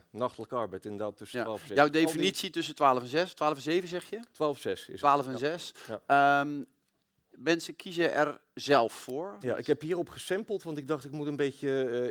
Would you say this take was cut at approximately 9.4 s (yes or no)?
yes